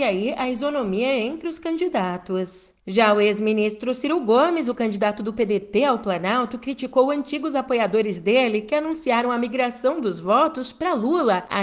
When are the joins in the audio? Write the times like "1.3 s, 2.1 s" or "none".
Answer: 2.8 s